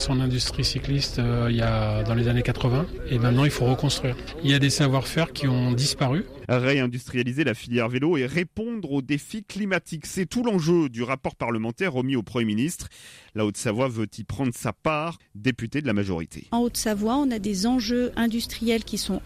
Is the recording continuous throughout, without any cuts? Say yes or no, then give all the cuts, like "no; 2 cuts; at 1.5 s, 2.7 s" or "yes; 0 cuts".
no; 1 cut; at 15.2 s